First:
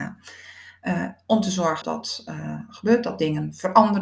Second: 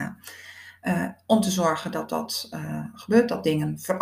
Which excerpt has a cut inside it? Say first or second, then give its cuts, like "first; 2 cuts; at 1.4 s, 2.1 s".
first; 1 cut; at 1.8 s